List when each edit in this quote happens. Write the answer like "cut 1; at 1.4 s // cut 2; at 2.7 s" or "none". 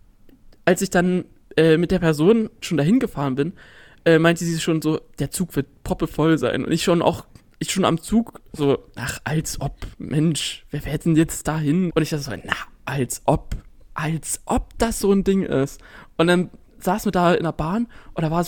cut 1; at 2.6 s // cut 2; at 11.9 s

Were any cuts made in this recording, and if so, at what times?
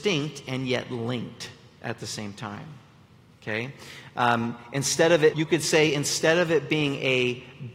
cut 1; at 5.3 s

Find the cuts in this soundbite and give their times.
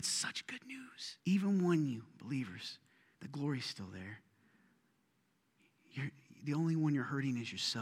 cut 1; at 1.2 s // cut 2; at 3.1 s

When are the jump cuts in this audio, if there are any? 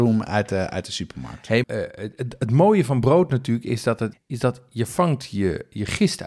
cut 1; at 1.6 s // cut 2; at 4.1 s

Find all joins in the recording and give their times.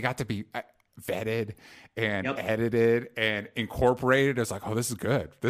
none

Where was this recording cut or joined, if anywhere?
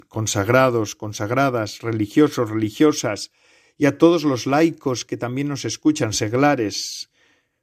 none

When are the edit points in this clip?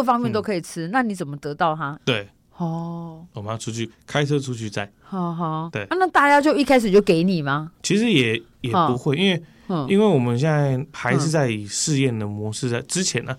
cut 1; at 2.0 s // cut 2; at 3.9 s // cut 3; at 7.8 s

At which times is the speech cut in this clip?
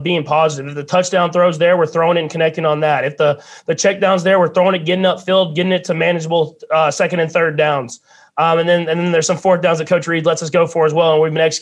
none

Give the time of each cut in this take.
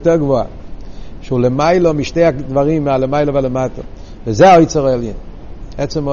cut 1; at 1.2 s

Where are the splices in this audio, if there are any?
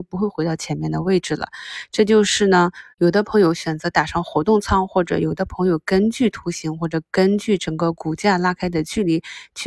cut 1; at 2.9 s

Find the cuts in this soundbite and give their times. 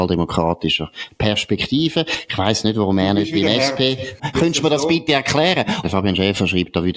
cut 1; at 4.2 s // cut 2; at 5.8 s

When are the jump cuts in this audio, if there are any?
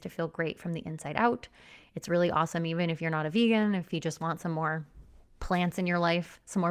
none

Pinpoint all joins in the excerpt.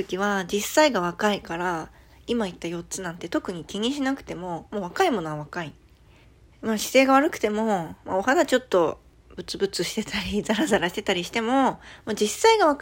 none

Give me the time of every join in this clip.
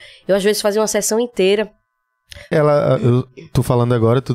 cut 1; at 2.5 s

